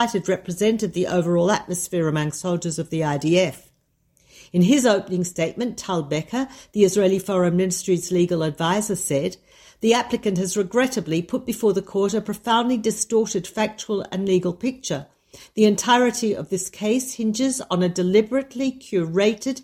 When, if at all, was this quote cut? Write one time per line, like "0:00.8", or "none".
none